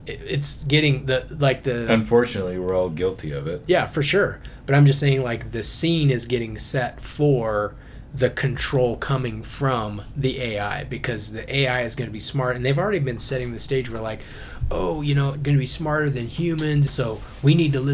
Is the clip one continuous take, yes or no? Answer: no